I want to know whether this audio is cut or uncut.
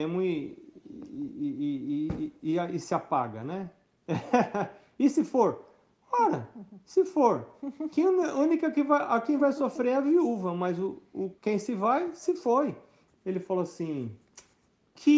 cut